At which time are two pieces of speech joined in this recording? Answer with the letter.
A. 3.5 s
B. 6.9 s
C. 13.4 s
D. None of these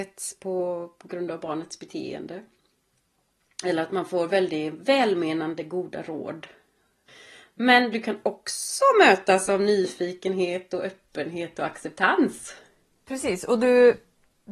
D